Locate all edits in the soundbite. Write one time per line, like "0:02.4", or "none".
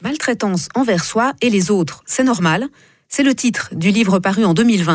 none